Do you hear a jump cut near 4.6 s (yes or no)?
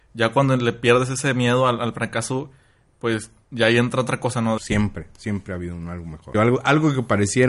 yes